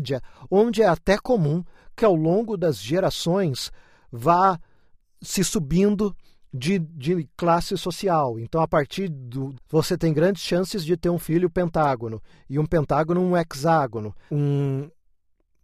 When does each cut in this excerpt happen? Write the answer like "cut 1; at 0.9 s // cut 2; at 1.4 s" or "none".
cut 1; at 9.5 s // cut 2; at 14.3 s